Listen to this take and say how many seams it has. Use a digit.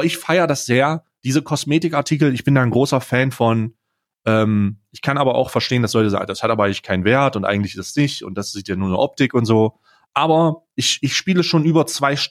0